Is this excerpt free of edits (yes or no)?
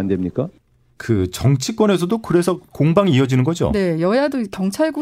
yes